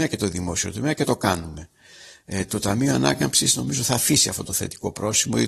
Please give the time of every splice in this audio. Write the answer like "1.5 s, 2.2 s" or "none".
none